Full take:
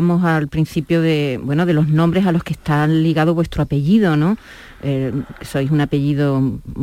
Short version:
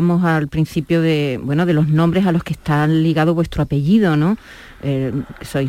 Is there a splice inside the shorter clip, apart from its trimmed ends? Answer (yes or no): no